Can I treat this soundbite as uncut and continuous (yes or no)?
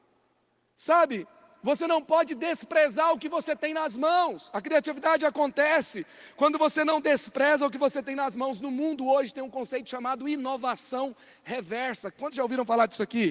yes